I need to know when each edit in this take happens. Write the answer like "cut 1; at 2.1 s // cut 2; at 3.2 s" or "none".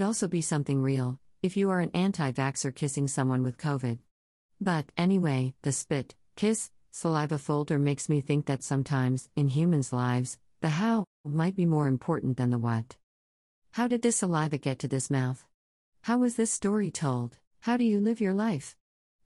cut 1; at 17.5 s